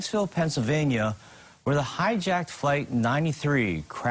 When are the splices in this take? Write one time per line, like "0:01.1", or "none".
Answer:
none